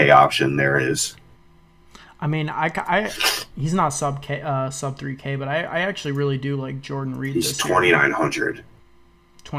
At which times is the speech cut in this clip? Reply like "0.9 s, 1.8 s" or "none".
none